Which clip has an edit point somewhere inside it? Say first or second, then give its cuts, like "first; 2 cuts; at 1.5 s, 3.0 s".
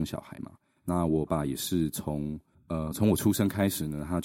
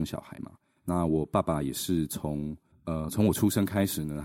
first; 1 cut; at 1.3 s